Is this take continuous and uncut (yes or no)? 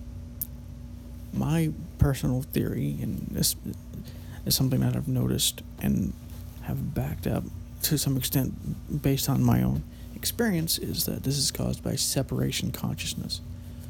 yes